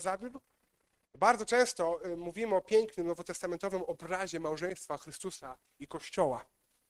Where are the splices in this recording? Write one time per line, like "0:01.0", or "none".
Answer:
0:01.0